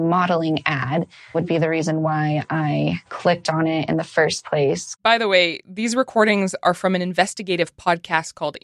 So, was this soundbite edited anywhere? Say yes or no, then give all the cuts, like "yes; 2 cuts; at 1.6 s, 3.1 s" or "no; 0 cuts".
yes; 2 cuts; at 1.3 s, 3.1 s